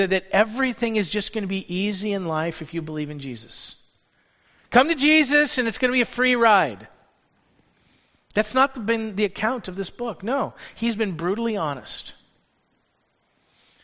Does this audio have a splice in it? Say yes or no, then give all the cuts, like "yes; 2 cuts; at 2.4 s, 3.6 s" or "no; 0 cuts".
no; 0 cuts